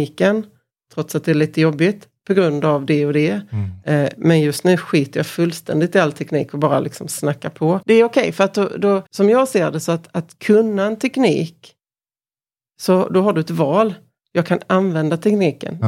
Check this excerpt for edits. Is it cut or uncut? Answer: cut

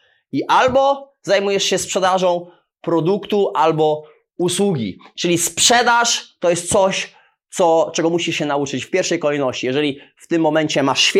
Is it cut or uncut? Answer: uncut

